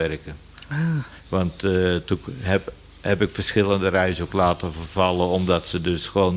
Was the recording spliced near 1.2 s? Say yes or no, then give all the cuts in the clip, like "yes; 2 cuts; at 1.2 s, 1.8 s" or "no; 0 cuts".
yes; 1 cut; at 1.2 s